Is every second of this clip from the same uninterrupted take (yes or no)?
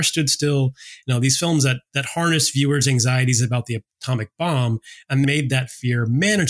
no